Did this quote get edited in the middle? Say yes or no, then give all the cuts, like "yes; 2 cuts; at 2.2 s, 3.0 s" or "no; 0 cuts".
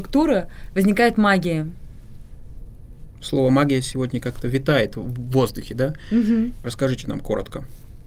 yes; 1 cut; at 6.6 s